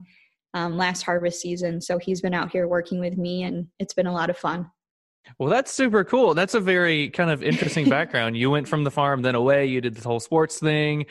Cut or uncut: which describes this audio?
uncut